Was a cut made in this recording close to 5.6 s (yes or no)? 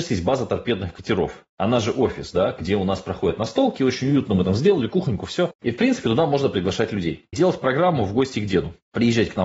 yes